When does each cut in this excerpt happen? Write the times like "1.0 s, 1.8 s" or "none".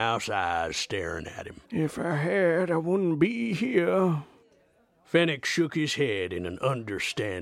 1.7 s